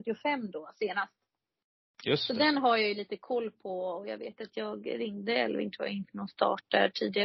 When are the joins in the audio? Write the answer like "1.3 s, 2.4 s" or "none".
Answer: none